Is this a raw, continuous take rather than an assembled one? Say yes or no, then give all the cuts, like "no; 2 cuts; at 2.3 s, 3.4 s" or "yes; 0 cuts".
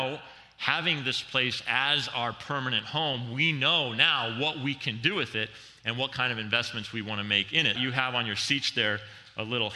no; 1 cut; at 7.8 s